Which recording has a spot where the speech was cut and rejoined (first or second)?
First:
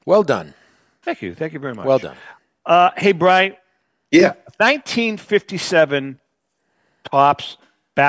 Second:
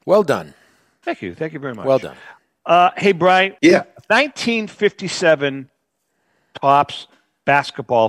second